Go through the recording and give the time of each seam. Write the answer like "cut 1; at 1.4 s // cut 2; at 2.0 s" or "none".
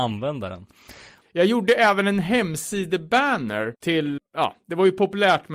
cut 1; at 1.2 s // cut 2; at 4.2 s